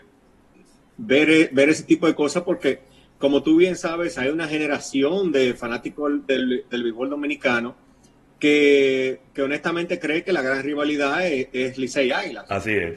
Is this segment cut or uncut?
uncut